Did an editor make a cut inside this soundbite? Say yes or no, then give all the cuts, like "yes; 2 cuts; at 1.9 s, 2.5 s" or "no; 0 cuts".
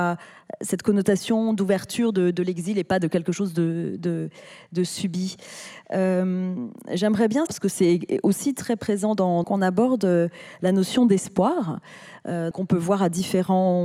yes; 3 cuts; at 7.5 s, 9.4 s, 12.5 s